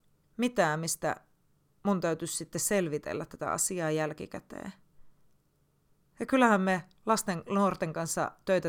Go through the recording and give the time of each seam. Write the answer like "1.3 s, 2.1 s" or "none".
none